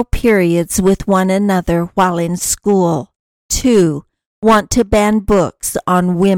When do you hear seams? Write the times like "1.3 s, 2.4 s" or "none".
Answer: none